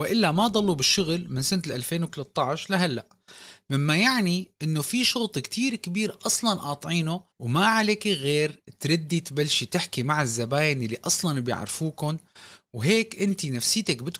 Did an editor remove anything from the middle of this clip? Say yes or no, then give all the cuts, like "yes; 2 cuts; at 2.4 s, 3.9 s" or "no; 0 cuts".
yes; 1 cut; at 7.3 s